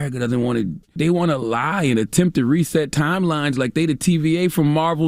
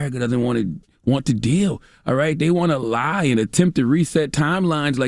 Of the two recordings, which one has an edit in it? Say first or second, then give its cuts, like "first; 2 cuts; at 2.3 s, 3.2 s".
first; 1 cut; at 1.0 s